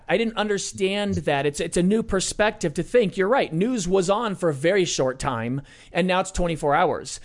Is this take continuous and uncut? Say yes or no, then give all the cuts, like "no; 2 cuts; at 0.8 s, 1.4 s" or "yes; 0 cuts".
yes; 0 cuts